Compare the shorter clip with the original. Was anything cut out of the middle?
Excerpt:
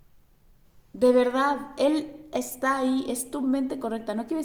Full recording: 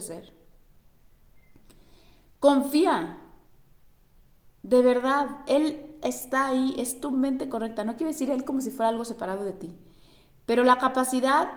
no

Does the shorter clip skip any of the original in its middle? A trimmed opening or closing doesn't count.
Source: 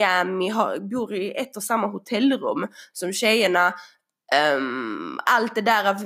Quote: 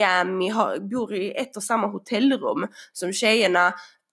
no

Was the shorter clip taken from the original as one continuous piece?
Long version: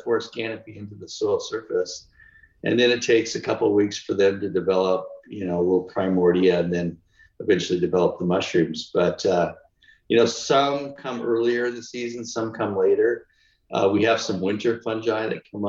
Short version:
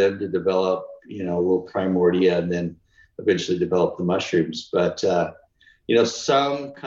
yes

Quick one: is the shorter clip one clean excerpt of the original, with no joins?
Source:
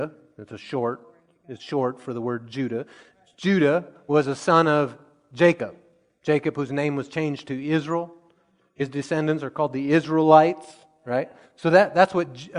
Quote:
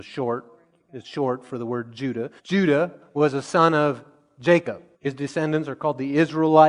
no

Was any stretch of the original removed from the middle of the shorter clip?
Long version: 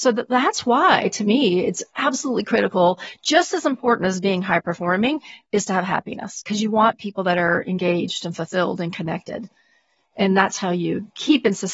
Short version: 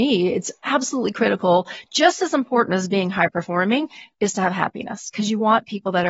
no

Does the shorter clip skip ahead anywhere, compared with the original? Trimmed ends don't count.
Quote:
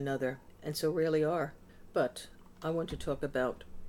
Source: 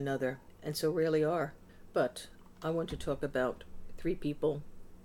no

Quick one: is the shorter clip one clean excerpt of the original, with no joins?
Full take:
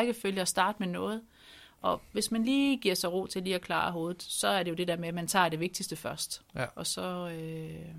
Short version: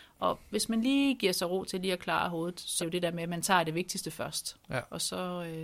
no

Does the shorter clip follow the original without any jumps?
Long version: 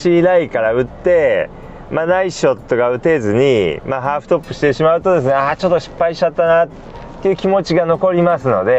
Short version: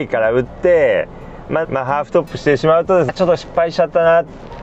no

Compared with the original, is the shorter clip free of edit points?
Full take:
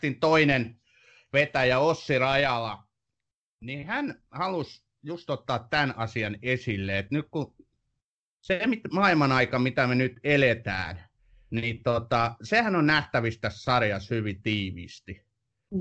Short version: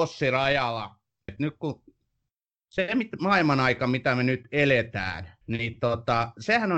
no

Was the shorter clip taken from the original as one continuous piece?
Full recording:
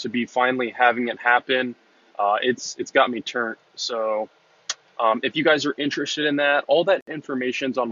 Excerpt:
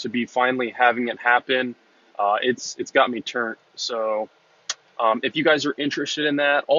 yes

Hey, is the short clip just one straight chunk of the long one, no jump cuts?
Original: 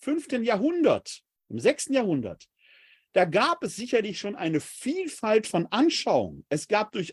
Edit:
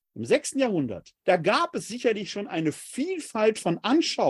no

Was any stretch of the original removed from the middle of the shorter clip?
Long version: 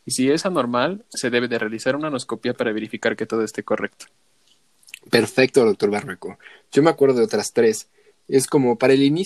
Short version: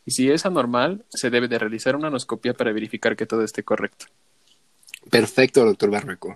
no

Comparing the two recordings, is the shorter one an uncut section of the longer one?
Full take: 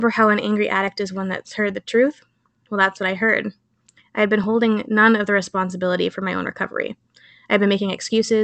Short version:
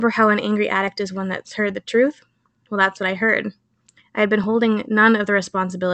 yes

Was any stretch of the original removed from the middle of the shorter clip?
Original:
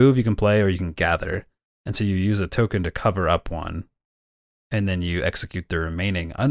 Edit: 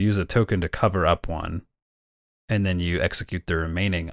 no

